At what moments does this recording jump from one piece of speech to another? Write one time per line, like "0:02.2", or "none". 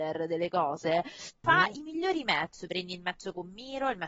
0:01.4